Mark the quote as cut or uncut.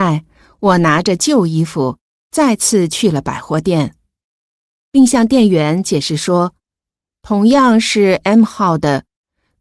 cut